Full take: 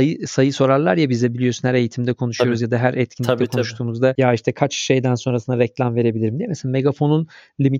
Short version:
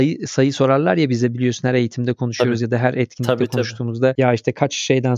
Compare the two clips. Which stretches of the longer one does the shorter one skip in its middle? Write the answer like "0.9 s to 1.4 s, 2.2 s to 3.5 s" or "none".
none